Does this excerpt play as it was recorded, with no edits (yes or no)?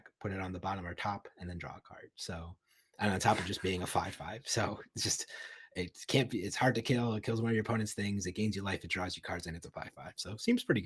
yes